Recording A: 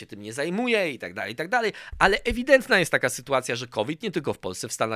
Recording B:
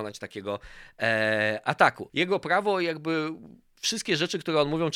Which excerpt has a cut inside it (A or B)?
B